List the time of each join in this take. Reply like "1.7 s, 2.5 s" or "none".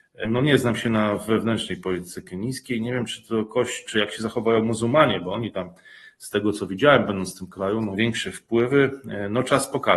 3.8 s, 7.9 s